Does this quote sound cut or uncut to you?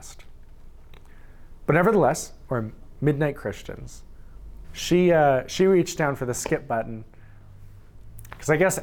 cut